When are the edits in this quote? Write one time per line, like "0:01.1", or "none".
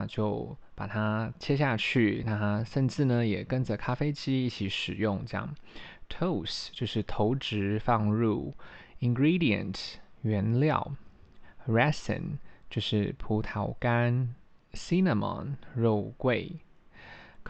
none